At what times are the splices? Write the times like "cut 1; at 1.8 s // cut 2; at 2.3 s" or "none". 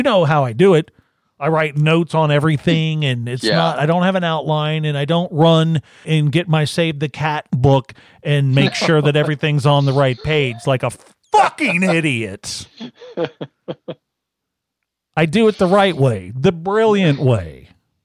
cut 1; at 6.0 s